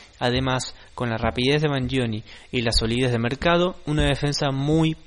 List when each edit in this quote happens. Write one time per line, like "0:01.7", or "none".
none

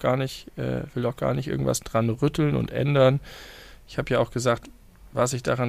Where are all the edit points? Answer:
none

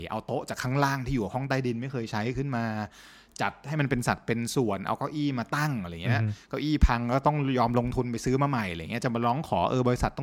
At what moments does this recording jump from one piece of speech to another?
none

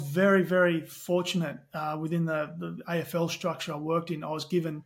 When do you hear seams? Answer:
none

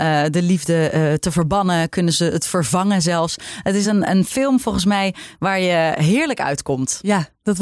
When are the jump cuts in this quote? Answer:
none

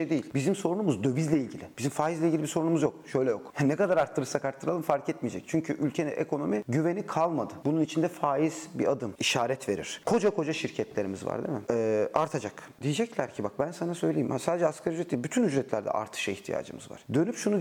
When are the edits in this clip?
0:07.6
0:10.0
0:11.7

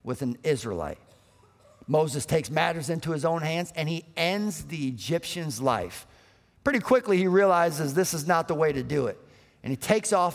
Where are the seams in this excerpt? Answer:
none

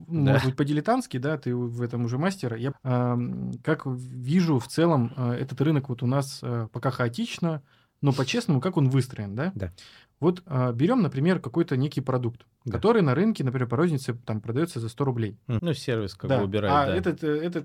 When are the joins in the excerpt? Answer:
0:02.7
0:15.6

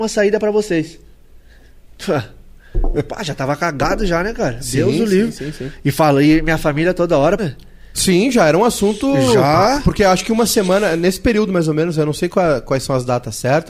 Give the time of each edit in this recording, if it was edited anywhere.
0:02.9
0:07.4

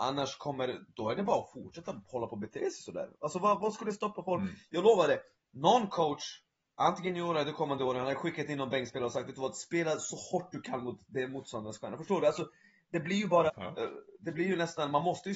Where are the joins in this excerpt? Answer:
0:03.6
0:05.3
0:13.5

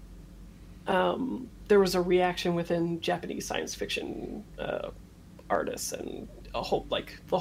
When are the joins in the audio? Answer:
none

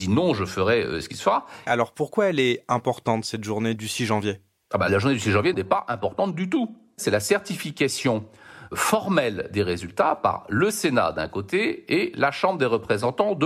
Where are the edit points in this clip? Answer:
0:01.7
0:03.8
0:05.5

